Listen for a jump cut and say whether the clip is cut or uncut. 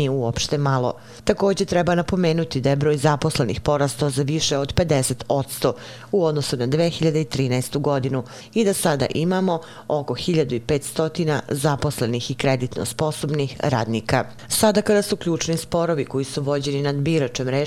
uncut